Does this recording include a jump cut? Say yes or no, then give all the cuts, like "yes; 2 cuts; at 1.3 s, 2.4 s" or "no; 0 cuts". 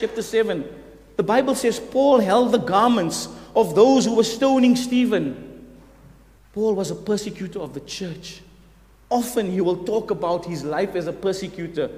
yes; 1 cut; at 6.4 s